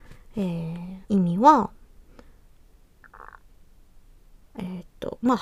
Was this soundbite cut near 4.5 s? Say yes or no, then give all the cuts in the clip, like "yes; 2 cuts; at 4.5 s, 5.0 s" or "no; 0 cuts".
no; 1 cut; at 1.0 s